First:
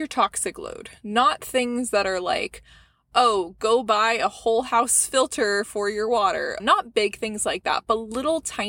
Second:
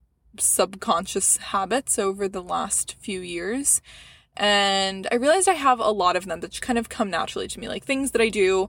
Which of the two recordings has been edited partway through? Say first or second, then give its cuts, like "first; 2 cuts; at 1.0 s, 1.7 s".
first; 1 cut; at 6.6 s